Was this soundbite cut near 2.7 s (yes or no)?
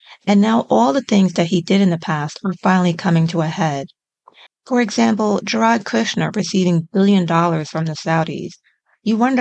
no